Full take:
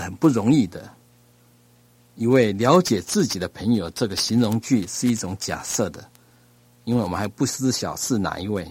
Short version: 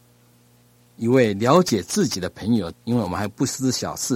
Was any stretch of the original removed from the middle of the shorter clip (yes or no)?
yes